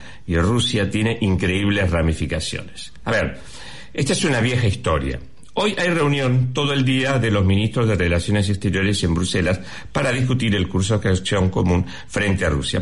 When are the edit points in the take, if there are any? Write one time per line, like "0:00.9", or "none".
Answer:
none